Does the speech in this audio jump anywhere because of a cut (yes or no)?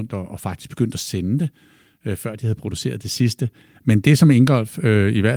yes